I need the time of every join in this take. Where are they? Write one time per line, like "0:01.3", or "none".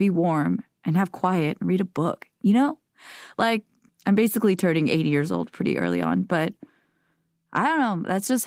none